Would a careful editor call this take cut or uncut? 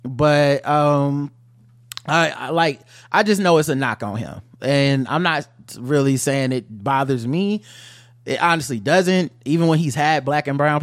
uncut